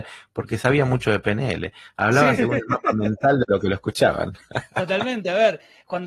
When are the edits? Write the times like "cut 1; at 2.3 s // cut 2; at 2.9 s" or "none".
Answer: none